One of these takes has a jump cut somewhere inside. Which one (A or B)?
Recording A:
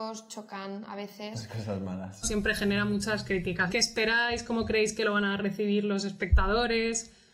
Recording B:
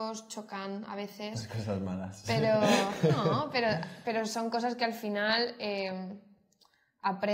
A